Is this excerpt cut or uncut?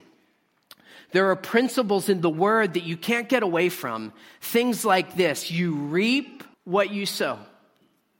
cut